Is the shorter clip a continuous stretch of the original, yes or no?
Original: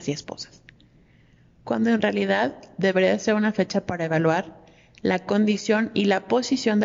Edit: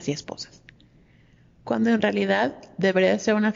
yes